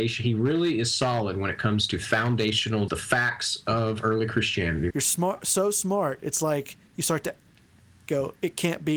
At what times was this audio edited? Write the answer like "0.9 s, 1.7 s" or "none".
2.9 s, 4.9 s